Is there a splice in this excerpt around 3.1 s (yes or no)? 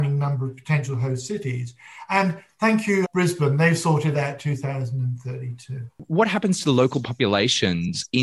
yes